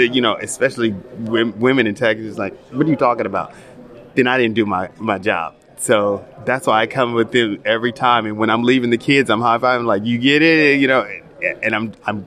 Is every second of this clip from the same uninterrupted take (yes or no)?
yes